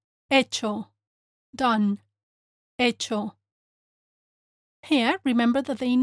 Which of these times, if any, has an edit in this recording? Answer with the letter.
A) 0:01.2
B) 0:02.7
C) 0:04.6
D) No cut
D